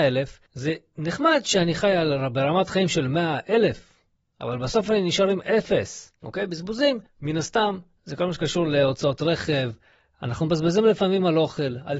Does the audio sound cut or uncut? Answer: cut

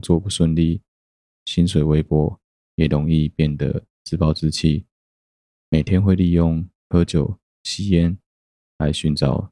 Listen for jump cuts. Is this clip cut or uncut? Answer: cut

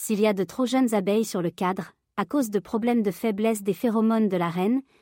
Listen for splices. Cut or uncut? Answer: uncut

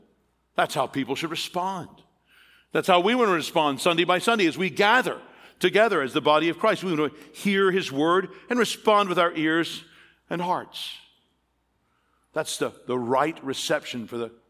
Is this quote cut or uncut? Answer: uncut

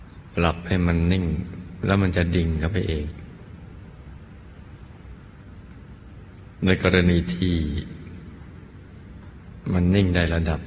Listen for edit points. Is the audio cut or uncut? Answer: uncut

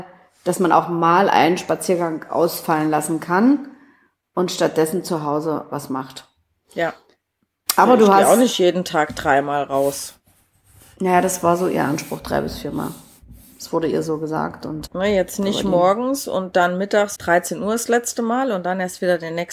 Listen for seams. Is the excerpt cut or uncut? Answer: cut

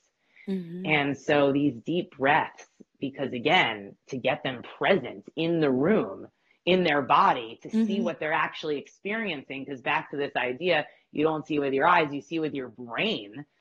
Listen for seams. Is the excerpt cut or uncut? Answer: uncut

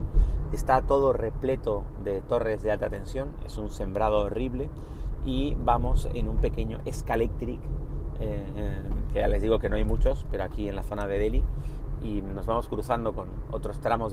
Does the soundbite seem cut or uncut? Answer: uncut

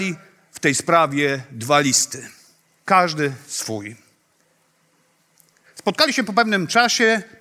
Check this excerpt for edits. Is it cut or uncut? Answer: uncut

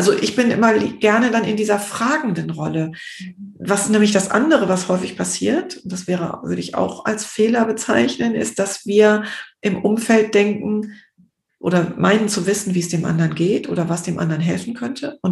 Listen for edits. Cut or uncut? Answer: uncut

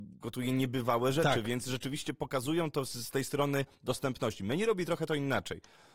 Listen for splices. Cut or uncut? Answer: uncut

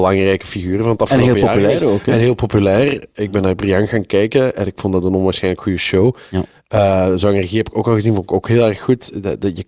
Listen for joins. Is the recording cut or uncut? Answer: uncut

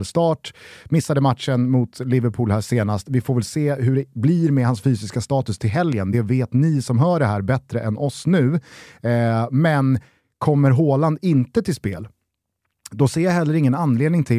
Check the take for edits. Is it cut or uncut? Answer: uncut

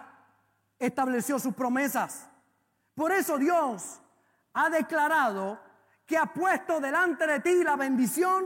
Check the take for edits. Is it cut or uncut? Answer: uncut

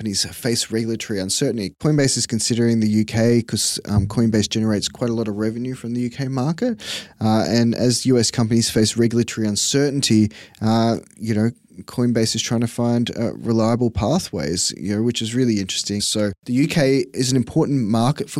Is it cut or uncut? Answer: cut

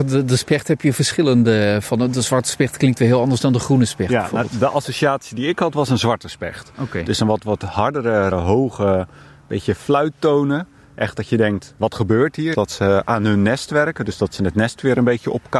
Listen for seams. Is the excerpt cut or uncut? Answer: cut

